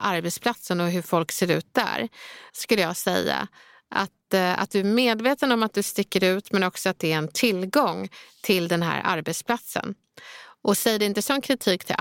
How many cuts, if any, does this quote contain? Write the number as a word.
one